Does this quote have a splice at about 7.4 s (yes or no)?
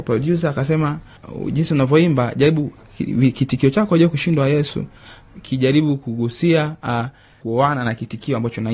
no